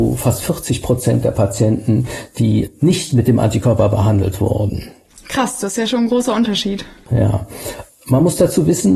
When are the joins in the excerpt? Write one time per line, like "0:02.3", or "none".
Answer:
none